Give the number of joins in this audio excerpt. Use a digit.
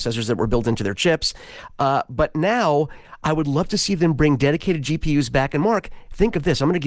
0